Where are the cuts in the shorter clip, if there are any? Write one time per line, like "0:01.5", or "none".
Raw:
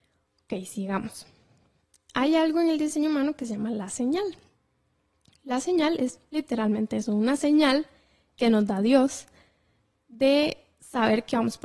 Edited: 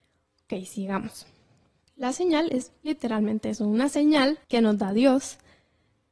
0:01.9
0:04.4